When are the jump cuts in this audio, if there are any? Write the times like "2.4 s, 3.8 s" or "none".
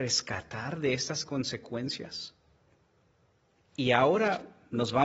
3.6 s